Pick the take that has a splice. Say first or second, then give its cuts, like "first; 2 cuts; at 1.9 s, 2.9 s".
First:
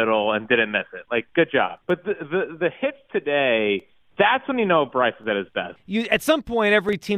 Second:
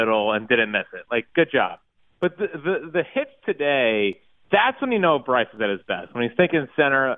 first; 2 cuts; at 1.8 s, 5.8 s